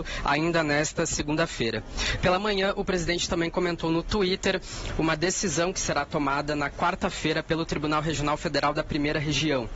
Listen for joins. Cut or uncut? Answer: cut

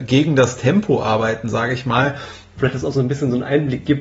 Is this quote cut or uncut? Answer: cut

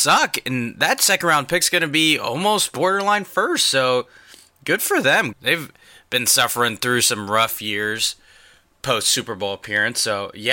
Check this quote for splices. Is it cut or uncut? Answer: cut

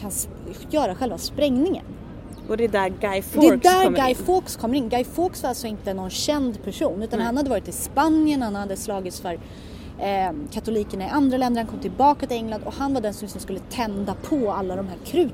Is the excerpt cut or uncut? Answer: uncut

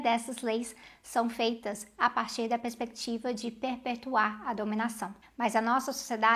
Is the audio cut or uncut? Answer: cut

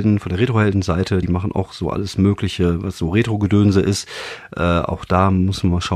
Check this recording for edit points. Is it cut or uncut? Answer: uncut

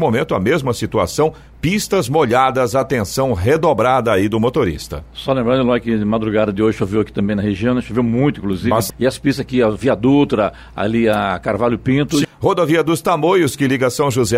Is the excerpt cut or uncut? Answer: cut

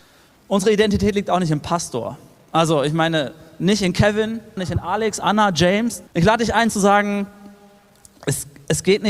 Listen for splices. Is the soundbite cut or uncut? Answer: cut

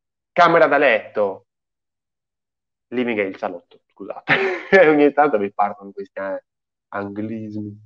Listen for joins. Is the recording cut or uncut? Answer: uncut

